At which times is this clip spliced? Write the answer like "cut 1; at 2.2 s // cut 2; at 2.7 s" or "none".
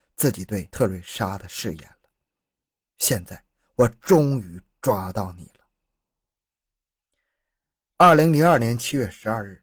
none